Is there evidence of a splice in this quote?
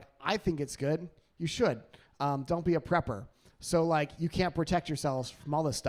no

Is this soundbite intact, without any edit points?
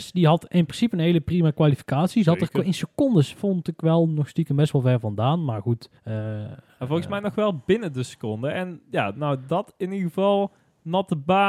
no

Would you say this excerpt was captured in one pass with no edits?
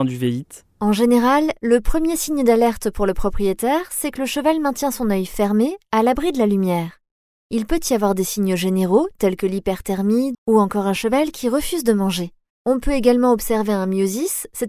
no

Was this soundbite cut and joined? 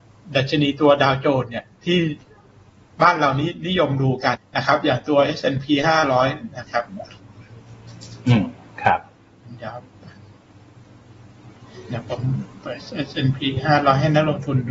yes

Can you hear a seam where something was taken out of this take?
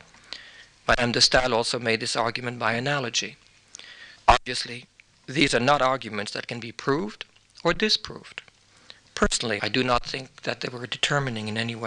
yes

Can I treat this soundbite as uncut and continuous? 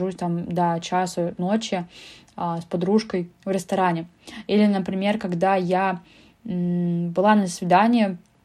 yes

